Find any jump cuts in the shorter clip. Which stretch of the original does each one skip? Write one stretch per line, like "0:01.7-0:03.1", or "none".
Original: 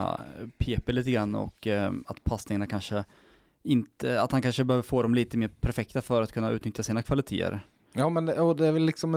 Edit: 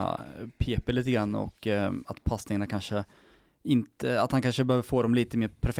none